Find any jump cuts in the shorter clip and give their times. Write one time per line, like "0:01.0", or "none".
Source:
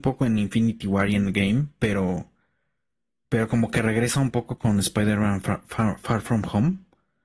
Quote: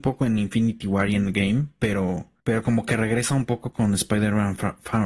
0:02.4